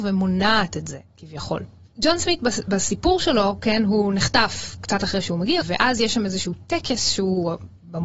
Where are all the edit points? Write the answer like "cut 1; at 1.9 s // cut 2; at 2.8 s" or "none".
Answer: cut 1; at 1.9 s // cut 2; at 5.6 s